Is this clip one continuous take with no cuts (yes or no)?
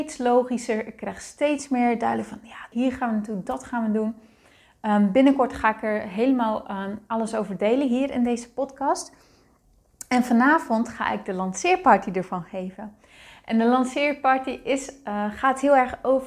no